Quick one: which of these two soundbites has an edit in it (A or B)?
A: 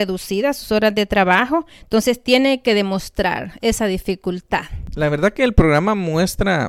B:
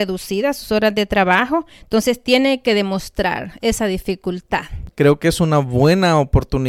B